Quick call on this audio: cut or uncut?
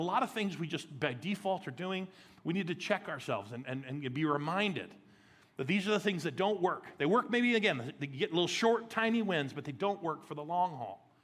uncut